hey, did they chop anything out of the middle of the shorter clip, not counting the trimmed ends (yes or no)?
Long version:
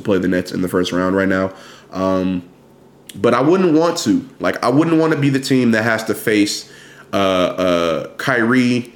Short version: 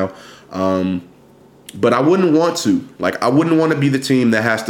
no